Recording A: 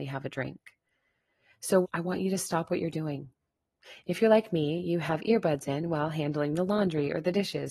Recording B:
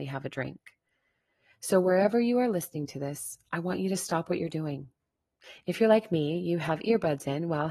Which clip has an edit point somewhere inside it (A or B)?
A